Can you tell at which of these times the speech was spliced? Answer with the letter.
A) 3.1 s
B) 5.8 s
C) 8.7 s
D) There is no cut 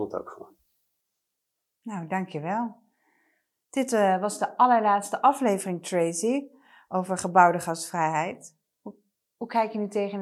D